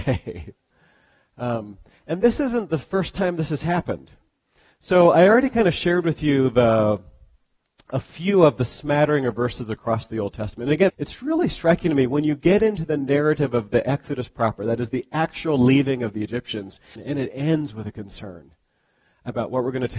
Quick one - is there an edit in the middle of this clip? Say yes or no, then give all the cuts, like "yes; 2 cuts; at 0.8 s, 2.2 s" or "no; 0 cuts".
yes; 2 cuts; at 10.9 s, 17.0 s